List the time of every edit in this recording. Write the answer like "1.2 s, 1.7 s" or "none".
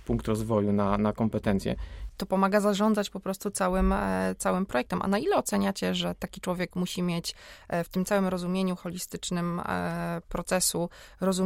2.1 s